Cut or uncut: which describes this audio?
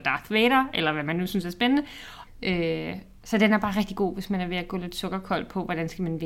cut